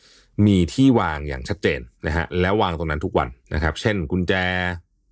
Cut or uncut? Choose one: cut